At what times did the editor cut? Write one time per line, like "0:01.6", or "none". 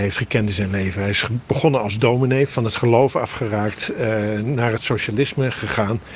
none